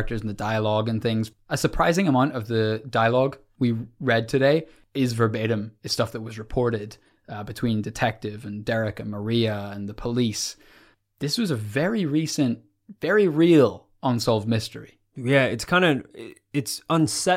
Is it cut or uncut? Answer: uncut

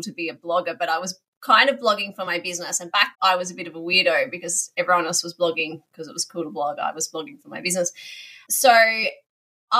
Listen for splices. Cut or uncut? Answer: cut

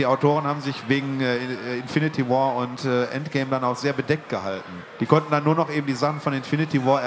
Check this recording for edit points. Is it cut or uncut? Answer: cut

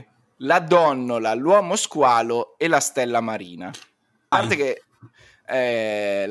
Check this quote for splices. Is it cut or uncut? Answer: cut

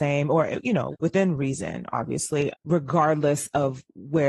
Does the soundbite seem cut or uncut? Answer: cut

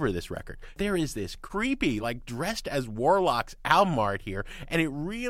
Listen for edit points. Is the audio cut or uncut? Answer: uncut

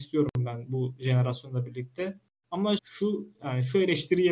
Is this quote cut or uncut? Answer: cut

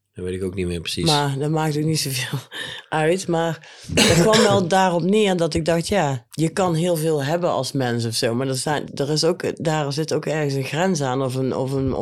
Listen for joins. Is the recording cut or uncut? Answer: cut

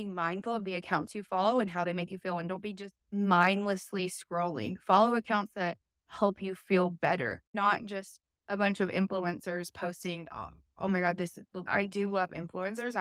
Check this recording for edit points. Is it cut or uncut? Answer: cut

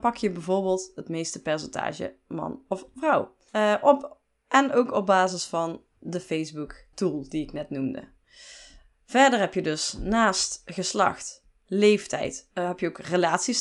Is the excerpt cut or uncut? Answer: cut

